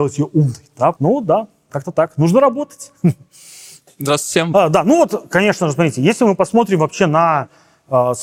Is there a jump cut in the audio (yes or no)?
yes